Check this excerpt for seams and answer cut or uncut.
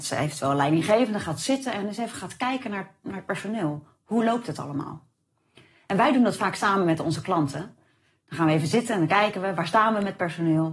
uncut